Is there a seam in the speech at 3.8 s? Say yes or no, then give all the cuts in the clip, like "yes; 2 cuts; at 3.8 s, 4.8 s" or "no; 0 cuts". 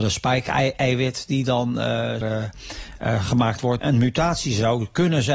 yes; 2 cuts; at 2.2 s, 3.8 s